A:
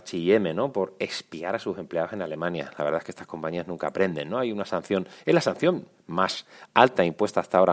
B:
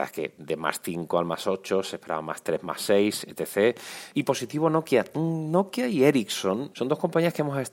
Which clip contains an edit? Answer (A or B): B